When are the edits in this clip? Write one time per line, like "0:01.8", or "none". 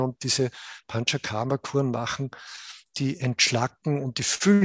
none